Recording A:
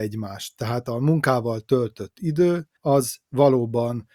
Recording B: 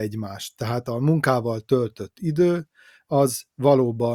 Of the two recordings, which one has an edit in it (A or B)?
A